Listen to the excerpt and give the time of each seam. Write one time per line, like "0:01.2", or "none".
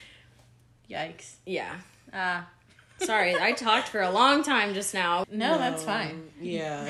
0:05.2